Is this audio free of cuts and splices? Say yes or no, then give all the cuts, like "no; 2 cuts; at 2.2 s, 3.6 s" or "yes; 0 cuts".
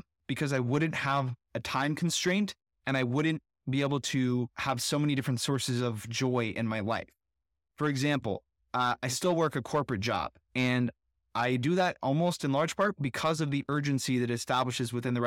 yes; 0 cuts